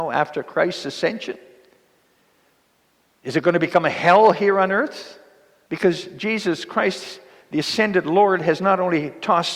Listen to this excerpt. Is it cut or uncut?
cut